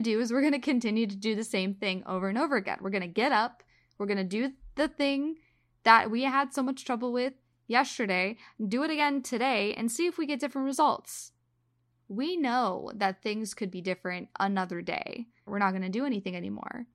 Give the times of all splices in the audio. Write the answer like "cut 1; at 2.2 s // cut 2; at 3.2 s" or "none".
cut 1; at 12.0 s // cut 2; at 15.5 s